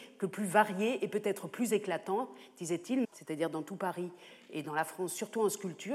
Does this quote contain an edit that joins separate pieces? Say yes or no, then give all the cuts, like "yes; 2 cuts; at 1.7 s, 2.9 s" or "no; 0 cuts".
yes; 1 cut; at 3.0 s